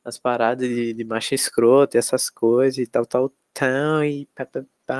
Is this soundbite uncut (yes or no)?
yes